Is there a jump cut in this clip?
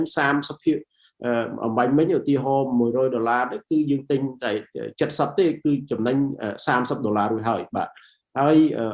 no; 0 cuts

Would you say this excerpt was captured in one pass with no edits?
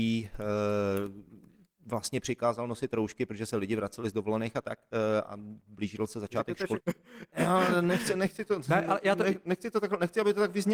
no; 1 cut; at 6.8 s

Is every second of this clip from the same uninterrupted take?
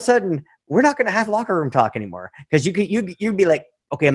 yes; 0 cuts

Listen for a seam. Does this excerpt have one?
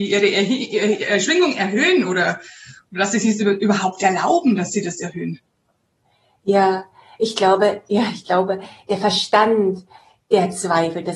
no; 0 cuts

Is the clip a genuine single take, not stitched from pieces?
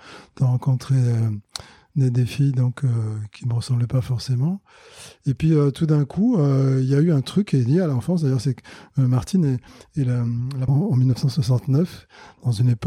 no; 1 cut; at 10.7 s

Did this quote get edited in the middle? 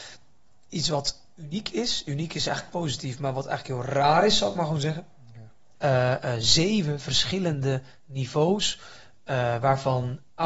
yes; 1 cut; at 5.8 s

